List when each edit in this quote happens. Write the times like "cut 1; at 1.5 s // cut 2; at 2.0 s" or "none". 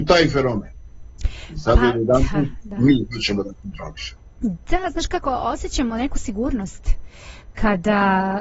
none